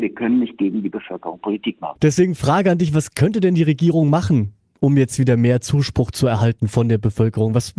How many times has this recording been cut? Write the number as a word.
one